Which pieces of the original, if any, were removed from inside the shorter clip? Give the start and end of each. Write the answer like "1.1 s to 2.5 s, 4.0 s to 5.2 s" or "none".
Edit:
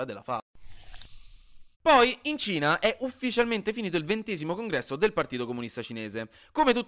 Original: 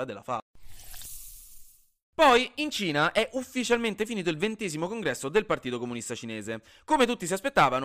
1.7 s to 2.1 s